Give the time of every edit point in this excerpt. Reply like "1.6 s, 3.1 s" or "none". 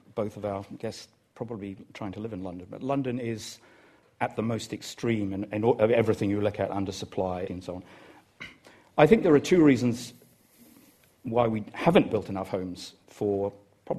7.5 s